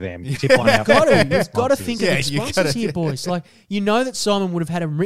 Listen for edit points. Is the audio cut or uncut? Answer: cut